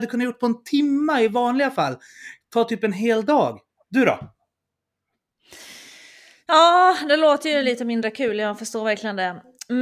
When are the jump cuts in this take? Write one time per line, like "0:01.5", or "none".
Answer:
none